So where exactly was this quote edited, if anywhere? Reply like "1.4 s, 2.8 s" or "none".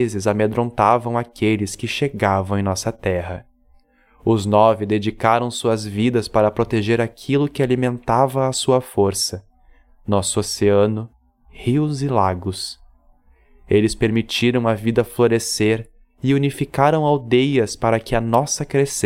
none

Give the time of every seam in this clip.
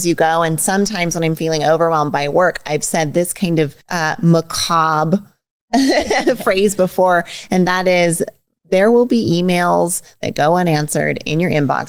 3.8 s

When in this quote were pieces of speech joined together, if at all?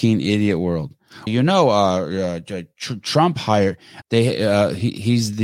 1.3 s, 4.0 s

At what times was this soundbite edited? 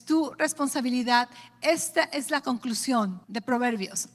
3.2 s

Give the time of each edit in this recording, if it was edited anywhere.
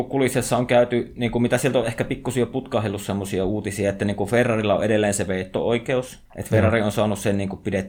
6.3 s

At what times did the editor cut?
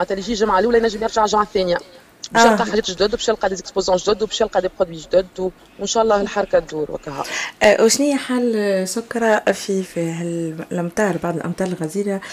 5.6 s, 9.8 s

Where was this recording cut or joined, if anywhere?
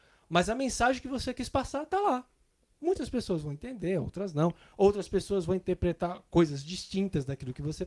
none

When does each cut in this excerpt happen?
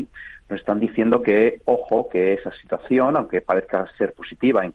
none

